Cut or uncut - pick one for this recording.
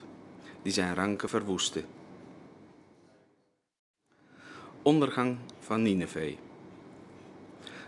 uncut